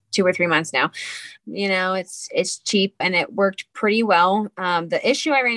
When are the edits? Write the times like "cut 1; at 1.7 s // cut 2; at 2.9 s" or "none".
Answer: cut 1; at 1.4 s // cut 2; at 3.0 s